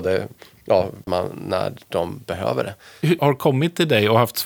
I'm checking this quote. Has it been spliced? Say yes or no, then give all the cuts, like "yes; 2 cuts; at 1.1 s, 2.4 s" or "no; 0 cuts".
yes; 2 cuts; at 1.1 s, 3.2 s